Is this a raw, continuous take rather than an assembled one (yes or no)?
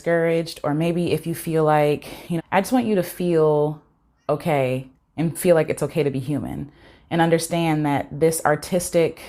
no